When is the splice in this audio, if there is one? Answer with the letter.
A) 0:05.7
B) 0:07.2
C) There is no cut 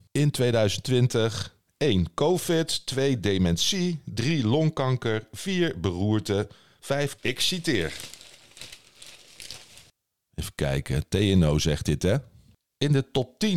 B